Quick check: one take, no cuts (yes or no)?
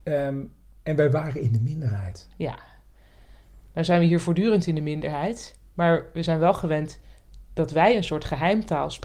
yes